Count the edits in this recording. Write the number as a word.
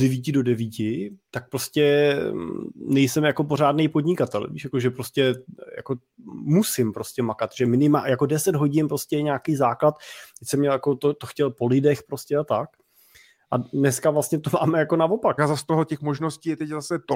one